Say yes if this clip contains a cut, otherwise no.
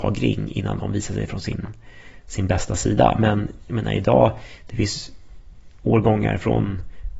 no